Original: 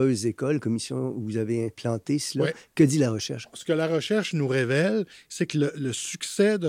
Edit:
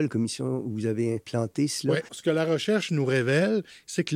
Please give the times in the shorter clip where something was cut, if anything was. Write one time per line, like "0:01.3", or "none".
0:02.1